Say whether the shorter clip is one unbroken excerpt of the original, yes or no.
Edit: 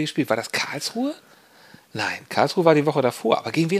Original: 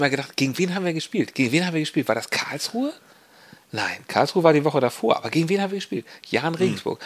yes